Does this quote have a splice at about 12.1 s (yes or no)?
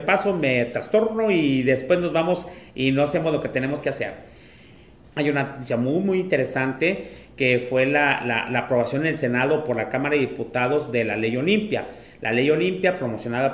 no